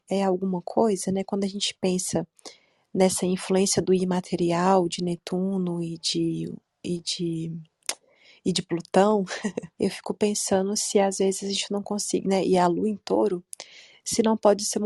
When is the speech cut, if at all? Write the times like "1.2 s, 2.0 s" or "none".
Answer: 9.7 s